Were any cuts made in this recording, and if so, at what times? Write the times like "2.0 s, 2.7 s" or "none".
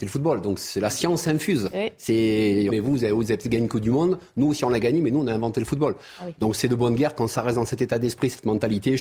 2.7 s